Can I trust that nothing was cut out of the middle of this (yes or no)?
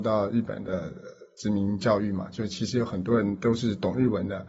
yes